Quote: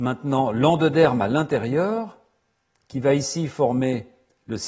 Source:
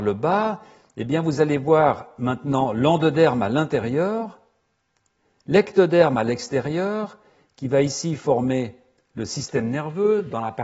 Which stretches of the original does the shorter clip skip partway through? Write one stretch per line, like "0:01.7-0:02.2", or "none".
0:05.0-0:07.5